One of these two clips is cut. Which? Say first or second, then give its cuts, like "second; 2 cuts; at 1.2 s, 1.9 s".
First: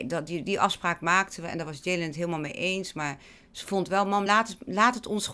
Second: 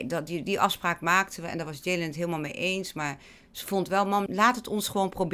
second; 1 cut; at 4.3 s